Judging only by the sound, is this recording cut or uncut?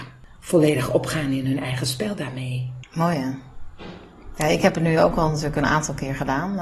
cut